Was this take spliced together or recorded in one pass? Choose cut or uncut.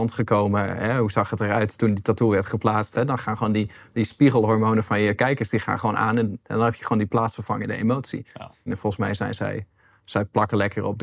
cut